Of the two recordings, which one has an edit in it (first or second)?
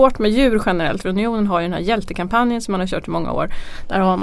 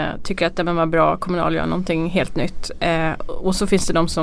first